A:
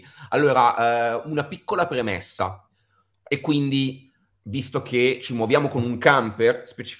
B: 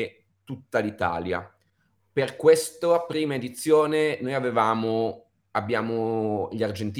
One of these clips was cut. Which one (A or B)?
A